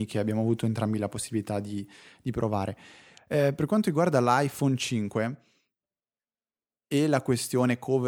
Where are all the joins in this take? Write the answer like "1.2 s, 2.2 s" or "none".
none